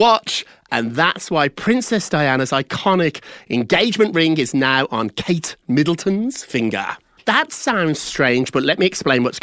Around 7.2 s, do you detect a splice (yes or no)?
yes